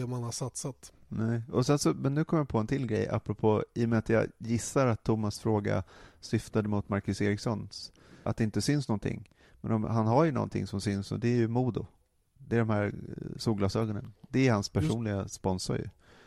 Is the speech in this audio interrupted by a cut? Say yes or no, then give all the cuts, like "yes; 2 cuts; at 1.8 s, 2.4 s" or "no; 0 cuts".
yes; 1 cut; at 8.3 s